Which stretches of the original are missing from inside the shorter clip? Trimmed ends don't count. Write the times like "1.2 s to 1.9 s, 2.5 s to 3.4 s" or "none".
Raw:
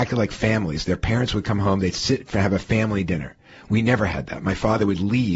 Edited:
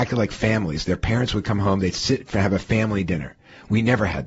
none